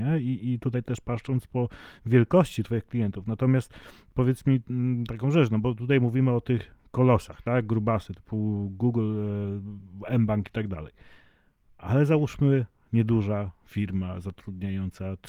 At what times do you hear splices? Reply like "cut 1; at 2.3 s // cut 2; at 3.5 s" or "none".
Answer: none